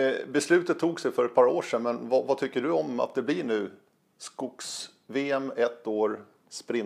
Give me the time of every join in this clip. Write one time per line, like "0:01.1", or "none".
none